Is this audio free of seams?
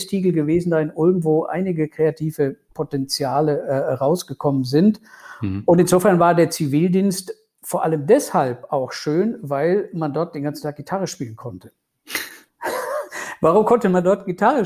yes; 0 cuts

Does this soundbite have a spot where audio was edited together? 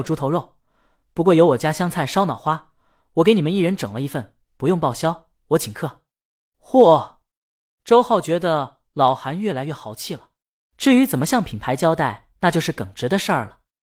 yes; 2 cuts; at 10.6 s, 12.4 s

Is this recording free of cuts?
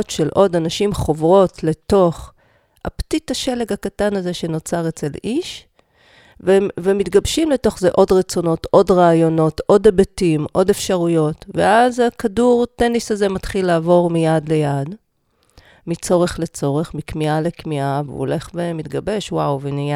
yes; 0 cuts

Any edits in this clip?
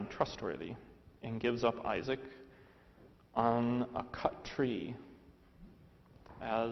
no; 0 cuts

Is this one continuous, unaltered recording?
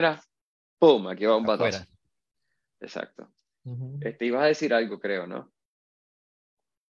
yes; 0 cuts

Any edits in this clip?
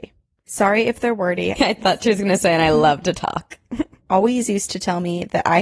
yes; 2 cuts; at 1.6 s, 4.0 s

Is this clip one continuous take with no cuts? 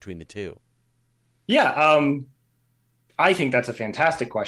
yes; 0 cuts

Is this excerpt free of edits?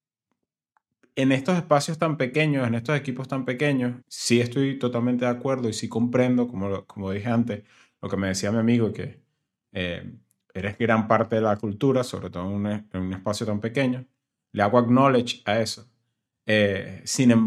no; 1 cut; at 4.0 s

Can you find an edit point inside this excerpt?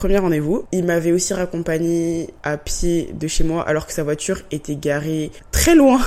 no; 0 cuts

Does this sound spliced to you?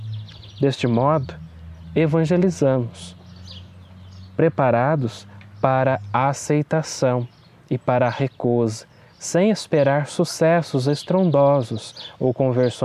no; 0 cuts

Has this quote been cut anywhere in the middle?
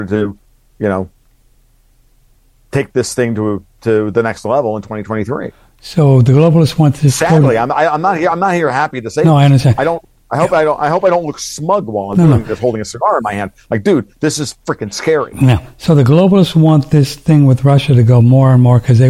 no; 0 cuts

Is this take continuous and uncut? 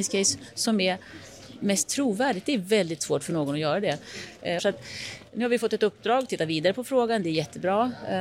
no; 1 cut; at 4.6 s

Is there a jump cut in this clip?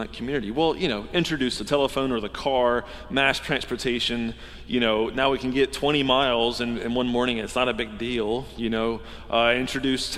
no; 0 cuts

